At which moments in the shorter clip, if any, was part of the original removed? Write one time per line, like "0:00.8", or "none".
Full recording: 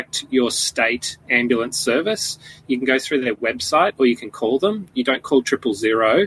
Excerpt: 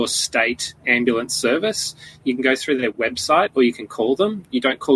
none